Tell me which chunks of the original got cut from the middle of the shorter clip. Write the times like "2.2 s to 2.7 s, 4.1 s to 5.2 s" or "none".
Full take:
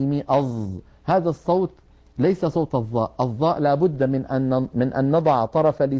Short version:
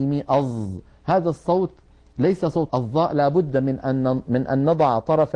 2.7 s to 3.2 s

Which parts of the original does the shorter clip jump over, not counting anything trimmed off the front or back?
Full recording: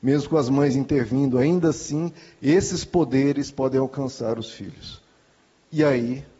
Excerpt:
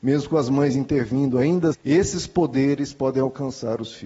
1.7 s to 2.3 s

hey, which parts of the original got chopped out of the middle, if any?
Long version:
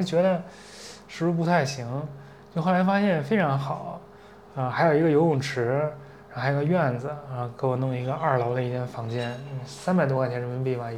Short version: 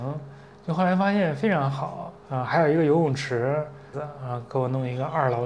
4.1 s to 4.5 s, 6.2 s to 7.0 s

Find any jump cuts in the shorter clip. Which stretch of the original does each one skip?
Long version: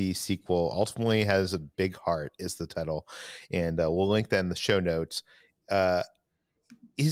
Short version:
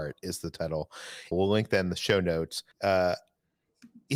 3.5 s to 3.9 s, 5.3 s to 5.6 s

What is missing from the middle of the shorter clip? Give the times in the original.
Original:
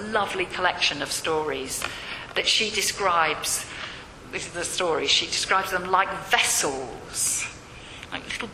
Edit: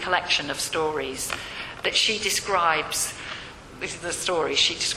none

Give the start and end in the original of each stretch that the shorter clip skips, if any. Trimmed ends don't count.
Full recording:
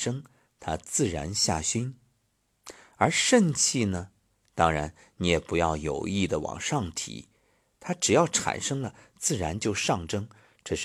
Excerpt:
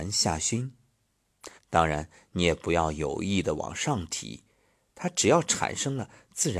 2.8 s to 4.4 s

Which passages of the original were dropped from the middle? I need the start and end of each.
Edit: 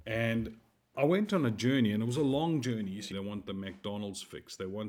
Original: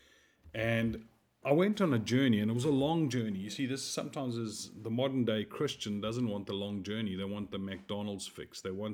3.6 s to 7.2 s

